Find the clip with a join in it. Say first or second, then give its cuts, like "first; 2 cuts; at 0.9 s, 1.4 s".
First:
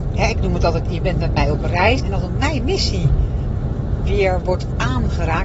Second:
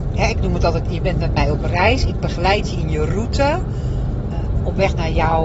first; 2 cuts; at 2.0 s, 4.0 s